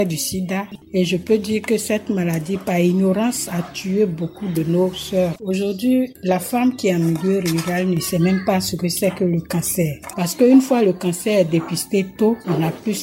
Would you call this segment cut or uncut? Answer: cut